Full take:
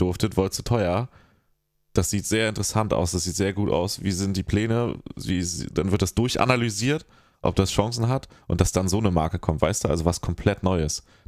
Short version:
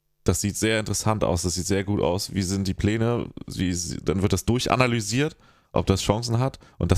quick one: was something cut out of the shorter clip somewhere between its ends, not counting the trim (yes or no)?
no